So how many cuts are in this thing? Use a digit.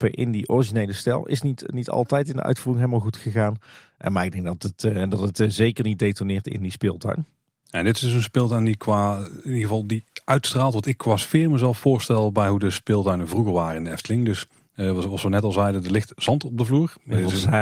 0